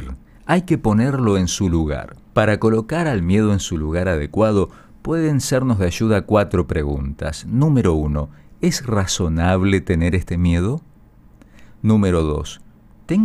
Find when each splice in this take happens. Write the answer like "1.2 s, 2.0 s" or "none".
2.3 s